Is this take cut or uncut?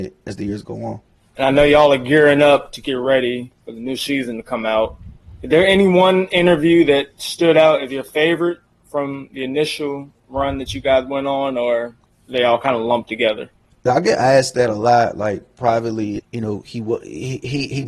cut